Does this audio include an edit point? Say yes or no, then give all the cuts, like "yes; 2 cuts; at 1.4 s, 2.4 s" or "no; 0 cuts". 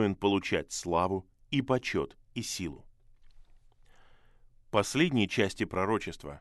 no; 0 cuts